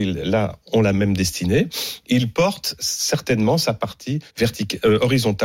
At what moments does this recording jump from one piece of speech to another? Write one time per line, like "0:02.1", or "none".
0:04.3